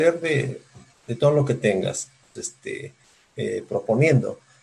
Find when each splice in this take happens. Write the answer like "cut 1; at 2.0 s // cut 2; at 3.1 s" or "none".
cut 1; at 2.4 s